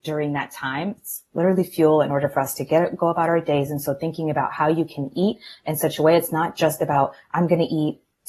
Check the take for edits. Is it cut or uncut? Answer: cut